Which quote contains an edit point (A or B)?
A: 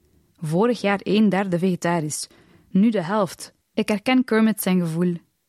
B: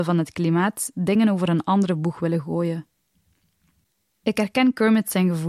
A